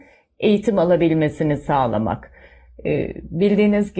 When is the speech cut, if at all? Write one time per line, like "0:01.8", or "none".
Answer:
none